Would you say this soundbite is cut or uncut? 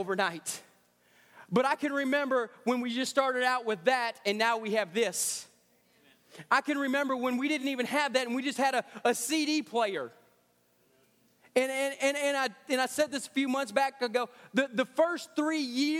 uncut